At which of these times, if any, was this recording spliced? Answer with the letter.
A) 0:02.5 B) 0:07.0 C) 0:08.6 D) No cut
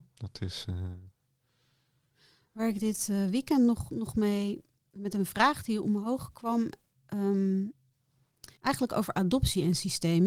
C